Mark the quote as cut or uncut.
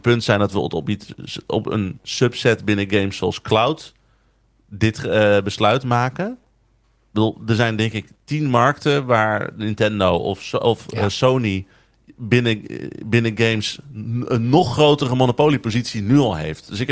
uncut